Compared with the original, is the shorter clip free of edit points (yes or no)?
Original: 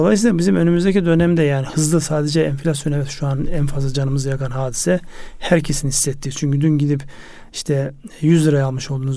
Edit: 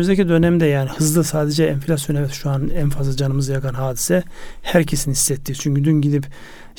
yes